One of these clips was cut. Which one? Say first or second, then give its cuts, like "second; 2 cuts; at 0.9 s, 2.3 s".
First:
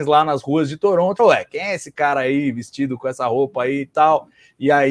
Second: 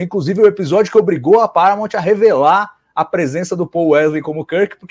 first; 1 cut; at 1.2 s